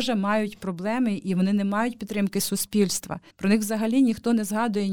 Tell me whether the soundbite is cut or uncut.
cut